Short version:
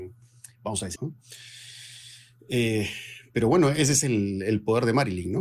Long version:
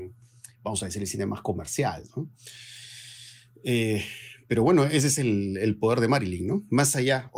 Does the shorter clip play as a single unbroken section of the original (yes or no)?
no